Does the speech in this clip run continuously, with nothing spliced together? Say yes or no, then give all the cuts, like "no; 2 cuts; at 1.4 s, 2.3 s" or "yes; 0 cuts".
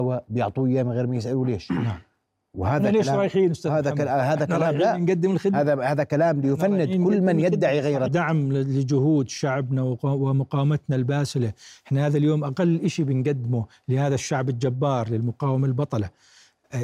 no; 1 cut; at 8.1 s